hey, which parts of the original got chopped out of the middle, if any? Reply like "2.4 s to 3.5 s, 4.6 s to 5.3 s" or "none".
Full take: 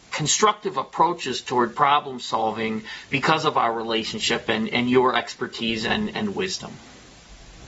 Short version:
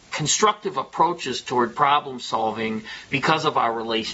none